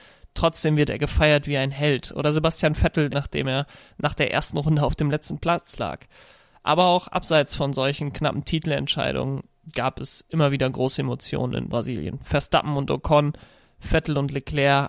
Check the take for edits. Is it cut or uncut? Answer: cut